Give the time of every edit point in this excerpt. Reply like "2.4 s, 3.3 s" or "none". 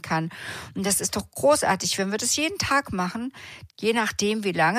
3.7 s